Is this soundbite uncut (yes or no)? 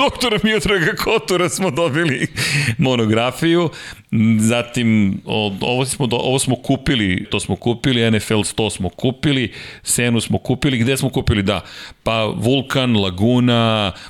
no